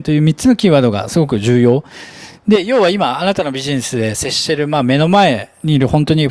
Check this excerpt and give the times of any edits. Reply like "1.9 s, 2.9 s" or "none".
none